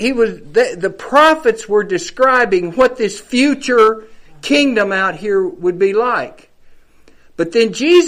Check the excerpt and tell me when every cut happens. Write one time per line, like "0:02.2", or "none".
none